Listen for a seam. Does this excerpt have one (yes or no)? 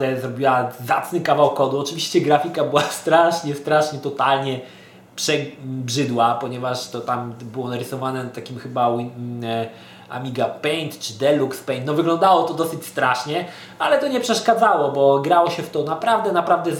no